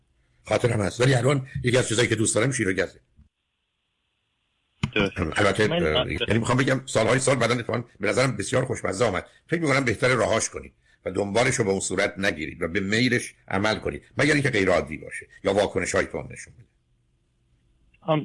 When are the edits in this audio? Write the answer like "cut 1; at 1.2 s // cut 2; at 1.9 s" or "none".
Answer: cut 1; at 6.2 s